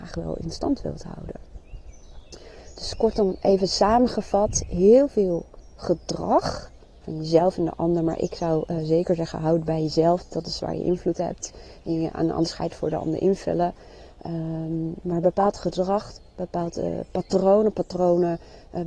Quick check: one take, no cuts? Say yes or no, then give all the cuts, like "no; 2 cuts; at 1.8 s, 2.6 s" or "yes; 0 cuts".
yes; 0 cuts